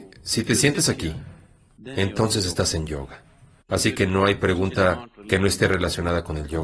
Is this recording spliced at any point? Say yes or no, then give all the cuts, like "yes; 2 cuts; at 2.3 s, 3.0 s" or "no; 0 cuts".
yes; 1 cut; at 1.8 s